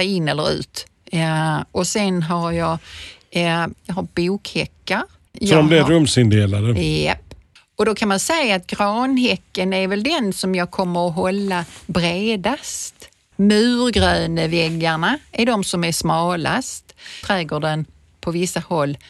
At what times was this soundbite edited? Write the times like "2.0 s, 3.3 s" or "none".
3.7 s, 17.2 s